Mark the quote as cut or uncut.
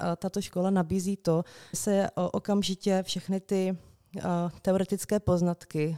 cut